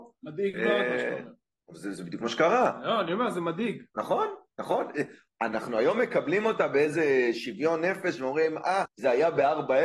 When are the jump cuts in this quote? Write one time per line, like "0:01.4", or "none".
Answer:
0:05.3
0:08.9

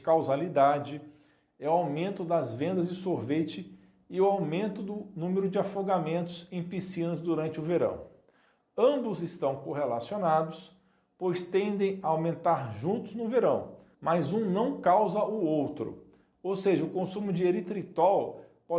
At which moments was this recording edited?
none

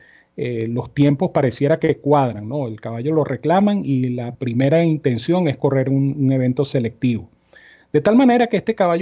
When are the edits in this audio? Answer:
none

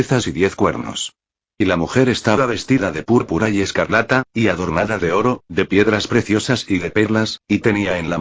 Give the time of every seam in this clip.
none

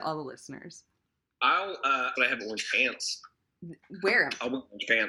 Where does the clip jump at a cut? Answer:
0:02.2

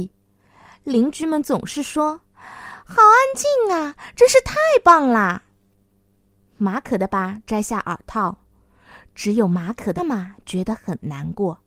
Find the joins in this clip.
0:07.1
0:10.0

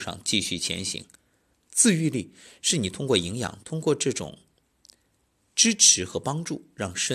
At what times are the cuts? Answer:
0:01.5
0:03.6

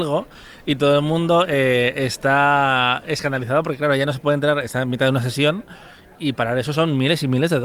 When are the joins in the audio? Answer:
none

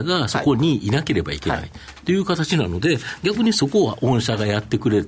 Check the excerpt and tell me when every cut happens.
none

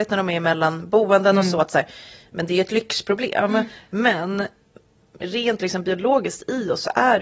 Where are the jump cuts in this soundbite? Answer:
none

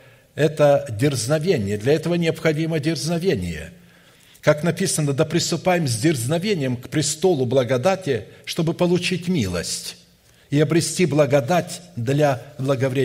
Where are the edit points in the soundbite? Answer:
none

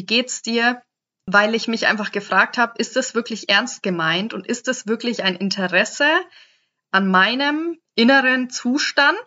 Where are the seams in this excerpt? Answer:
none

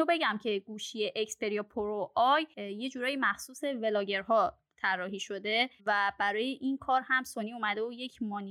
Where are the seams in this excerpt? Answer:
0:05.8

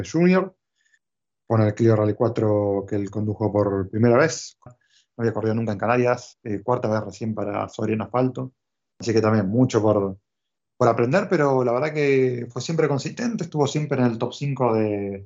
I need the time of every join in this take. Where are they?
0:04.7

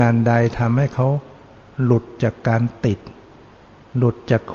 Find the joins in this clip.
none

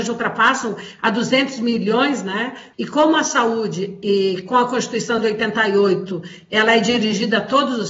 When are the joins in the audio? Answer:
0:02.7

